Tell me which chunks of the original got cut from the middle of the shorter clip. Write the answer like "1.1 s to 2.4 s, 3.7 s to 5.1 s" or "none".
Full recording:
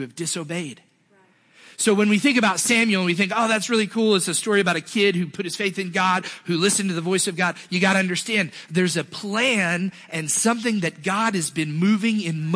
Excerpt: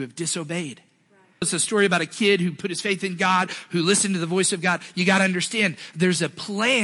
1.4 s to 4.2 s